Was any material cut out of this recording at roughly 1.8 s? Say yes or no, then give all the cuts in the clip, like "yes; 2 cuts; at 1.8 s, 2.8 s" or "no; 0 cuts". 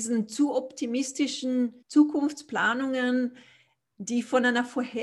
yes; 1 cut; at 1.8 s